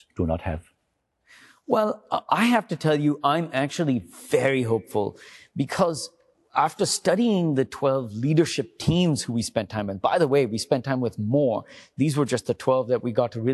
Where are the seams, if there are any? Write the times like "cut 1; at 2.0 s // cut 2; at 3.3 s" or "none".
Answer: none